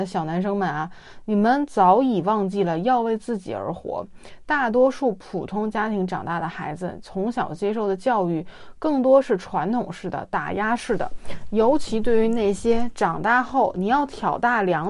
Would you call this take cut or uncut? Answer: uncut